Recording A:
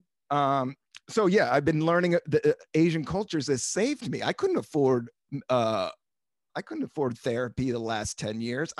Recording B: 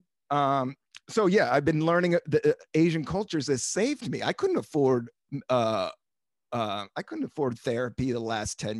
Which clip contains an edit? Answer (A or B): A